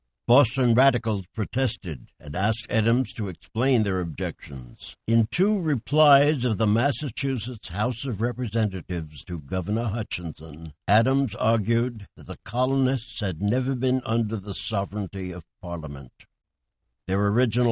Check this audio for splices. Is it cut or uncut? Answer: cut